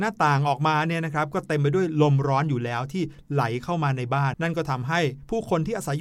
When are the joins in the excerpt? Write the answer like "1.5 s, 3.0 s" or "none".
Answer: 4.3 s